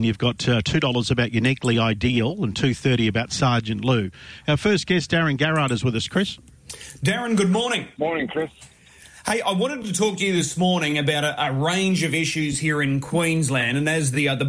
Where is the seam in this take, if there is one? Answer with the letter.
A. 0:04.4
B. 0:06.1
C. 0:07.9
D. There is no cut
C